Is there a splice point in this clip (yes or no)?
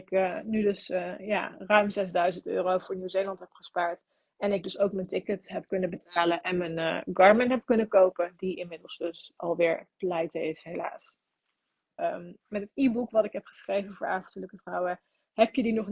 yes